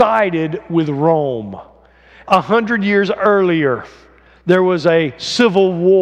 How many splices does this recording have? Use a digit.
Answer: 1